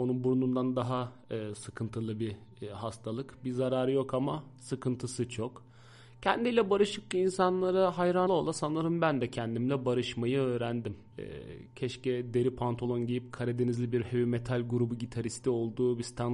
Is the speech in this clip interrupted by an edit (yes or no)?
yes